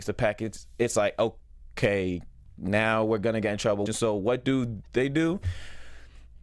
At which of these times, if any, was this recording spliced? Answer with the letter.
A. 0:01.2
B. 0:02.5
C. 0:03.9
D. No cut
C